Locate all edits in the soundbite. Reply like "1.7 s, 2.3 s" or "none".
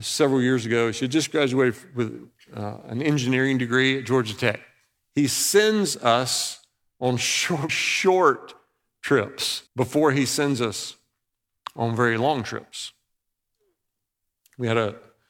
5.0 s, 7.7 s, 9.7 s